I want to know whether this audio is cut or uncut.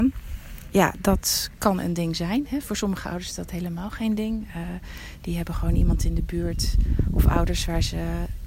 uncut